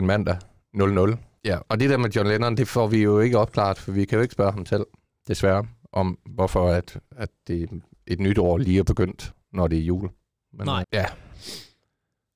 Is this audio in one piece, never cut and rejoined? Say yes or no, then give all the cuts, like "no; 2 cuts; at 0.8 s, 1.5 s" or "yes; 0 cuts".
no; 2 cuts; at 1.4 s, 10.8 s